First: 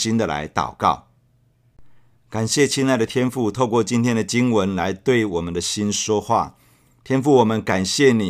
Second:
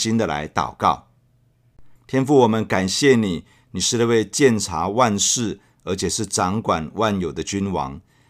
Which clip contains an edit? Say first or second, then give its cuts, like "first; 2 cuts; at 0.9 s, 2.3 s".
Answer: second; 1 cut; at 2.0 s